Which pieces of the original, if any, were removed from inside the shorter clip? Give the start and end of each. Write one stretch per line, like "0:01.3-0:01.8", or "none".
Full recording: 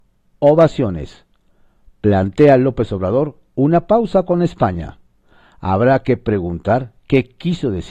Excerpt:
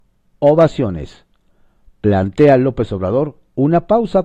none

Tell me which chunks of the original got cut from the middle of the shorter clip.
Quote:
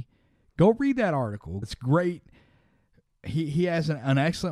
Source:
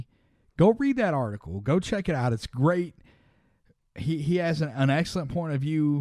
0:01.6-0:02.3

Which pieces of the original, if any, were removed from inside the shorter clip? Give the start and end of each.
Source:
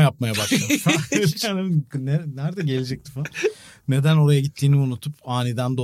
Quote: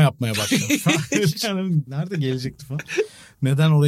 0:01.9-0:02.3

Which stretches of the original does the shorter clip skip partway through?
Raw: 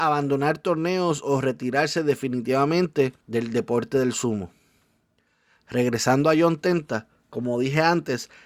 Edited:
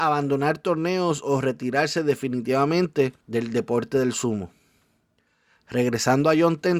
none

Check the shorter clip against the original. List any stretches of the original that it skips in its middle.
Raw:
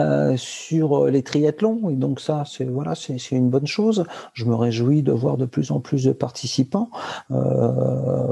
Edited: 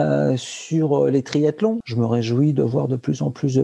0:01.8-0:04.3

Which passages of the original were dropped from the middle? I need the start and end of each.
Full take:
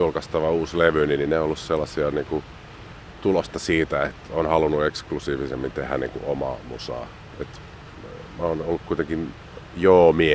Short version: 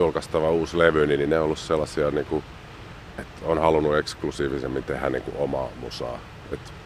0:03.2-0:04.1

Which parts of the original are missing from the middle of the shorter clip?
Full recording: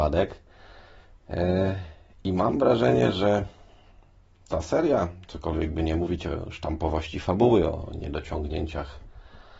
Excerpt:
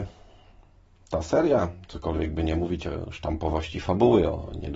none

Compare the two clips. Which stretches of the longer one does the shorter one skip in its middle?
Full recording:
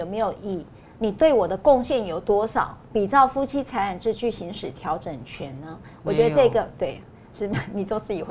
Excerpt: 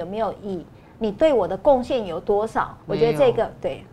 0:02.8-0:06.0

